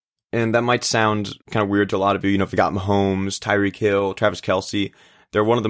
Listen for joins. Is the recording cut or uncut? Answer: cut